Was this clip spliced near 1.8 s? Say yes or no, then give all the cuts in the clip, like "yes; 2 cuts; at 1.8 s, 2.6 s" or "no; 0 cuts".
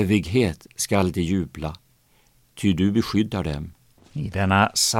no; 1 cut; at 4.0 s